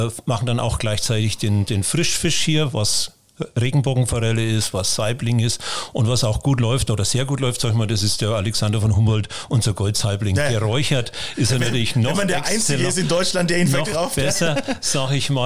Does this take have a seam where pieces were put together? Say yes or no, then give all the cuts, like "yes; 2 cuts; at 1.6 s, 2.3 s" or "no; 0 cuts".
no; 0 cuts